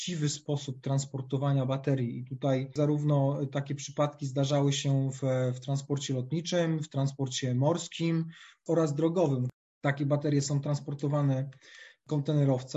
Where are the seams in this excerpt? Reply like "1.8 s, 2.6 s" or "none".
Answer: 9.7 s